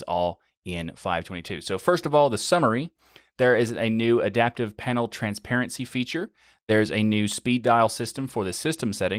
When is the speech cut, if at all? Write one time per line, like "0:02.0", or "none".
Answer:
none

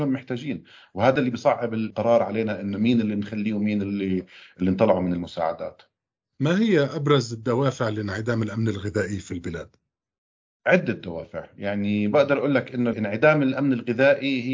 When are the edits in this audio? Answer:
none

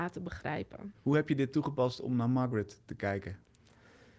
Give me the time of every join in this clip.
0:00.9

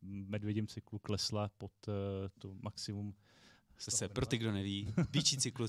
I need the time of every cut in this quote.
none

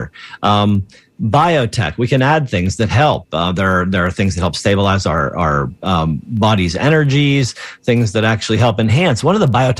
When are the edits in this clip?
none

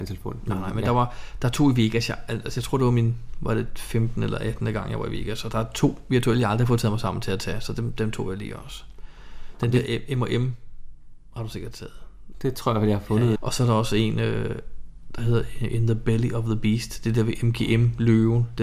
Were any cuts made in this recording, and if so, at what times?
0:12.3
0:13.4

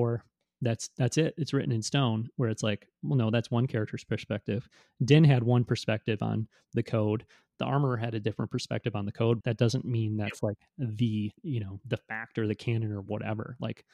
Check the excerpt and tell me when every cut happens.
0:09.4
0:11.4

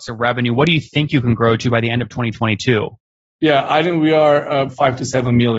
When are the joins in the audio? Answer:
0:04.7

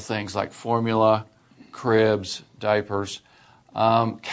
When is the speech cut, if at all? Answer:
none

